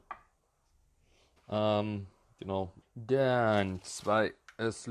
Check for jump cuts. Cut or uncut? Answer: cut